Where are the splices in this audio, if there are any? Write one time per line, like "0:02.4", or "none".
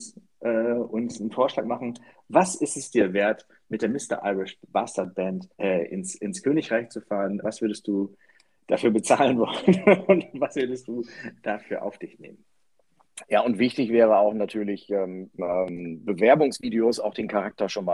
0:05.5
0:07.4
0:15.4